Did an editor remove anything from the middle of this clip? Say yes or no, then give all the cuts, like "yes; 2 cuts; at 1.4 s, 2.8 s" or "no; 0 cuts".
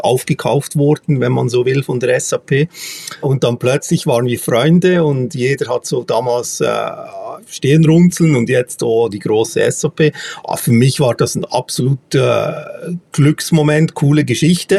yes; 1 cut; at 3.2 s